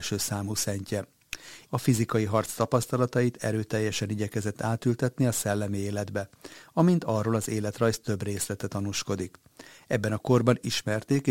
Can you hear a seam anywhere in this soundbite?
yes; 1 cut; at 1.7 s

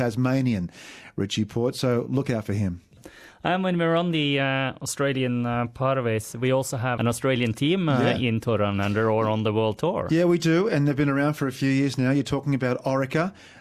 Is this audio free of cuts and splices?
yes; 0 cuts

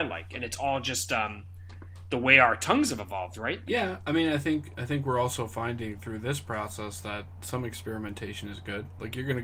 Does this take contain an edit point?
yes; 1 cut; at 3.6 s

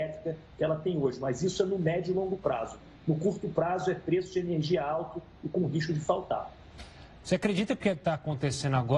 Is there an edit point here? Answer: yes; 1 cut; at 7.2 s

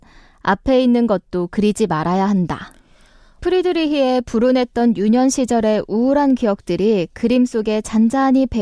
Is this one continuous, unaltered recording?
no; 1 cut; at 3.4 s

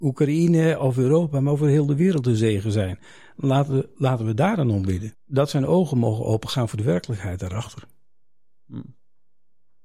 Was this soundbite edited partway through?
yes; 1 cut; at 5.1 s

